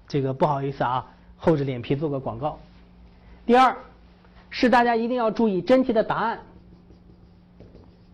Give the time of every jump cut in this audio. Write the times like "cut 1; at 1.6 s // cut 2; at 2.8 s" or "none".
none